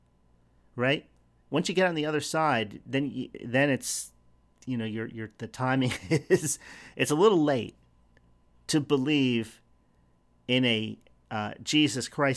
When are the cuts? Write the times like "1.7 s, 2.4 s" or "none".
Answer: 1.4 s